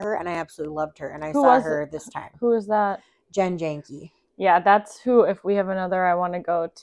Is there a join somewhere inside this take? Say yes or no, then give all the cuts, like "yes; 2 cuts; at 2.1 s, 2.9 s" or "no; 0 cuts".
no; 0 cuts